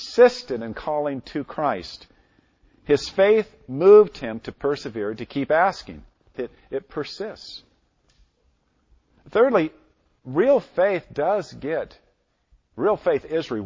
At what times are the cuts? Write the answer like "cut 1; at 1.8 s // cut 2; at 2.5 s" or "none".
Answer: cut 1; at 6.3 s